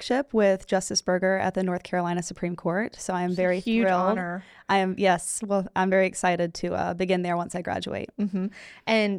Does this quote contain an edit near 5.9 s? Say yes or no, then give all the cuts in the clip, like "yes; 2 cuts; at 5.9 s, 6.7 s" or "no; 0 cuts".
no; 0 cuts